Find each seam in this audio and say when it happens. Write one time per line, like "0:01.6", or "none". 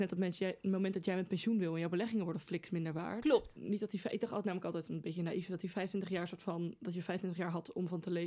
0:03.5

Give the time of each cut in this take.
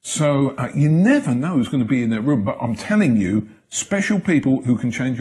none

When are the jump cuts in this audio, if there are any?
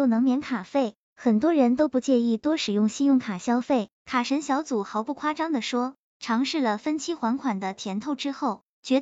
0:03.9
0:06.1

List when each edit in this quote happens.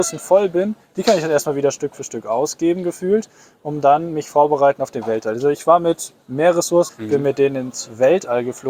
0:06.9

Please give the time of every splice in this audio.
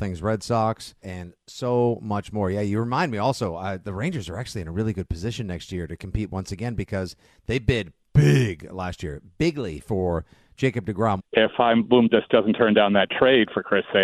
0:01.0
0:11.2

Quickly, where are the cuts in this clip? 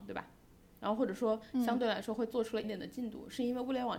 0:02.6

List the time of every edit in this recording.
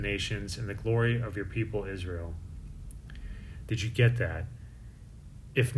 0:03.6

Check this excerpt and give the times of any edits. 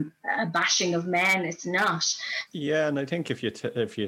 0:02.5

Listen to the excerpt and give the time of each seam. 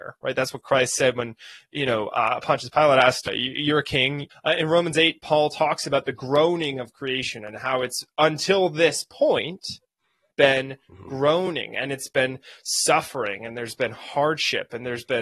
0:04.3

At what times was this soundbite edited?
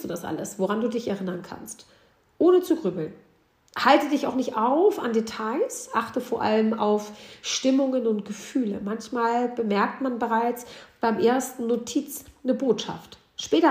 none

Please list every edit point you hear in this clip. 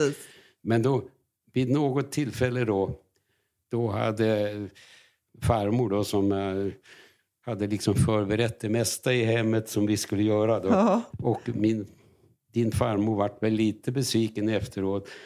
0:11.1

